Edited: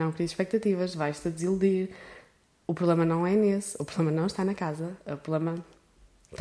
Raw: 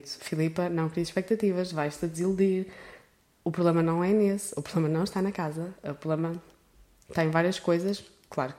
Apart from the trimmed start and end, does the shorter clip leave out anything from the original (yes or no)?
no